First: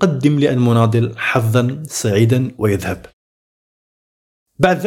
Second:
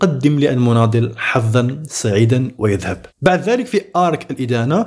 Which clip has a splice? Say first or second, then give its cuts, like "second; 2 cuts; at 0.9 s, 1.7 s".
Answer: second; 1 cut; at 3.1 s